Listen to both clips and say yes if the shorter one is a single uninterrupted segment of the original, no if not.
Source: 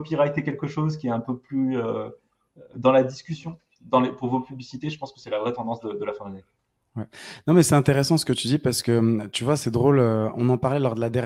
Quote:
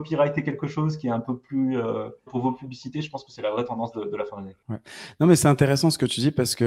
no